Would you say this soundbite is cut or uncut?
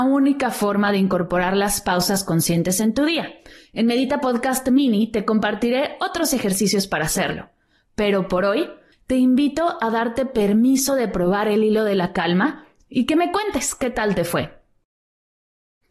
cut